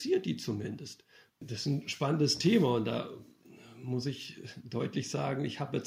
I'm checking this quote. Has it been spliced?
yes; 1 cut; at 1.3 s

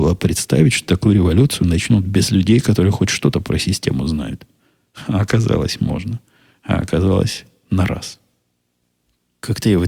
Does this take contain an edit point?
no; 0 cuts

